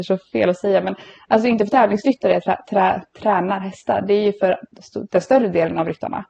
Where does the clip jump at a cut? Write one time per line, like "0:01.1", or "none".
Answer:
none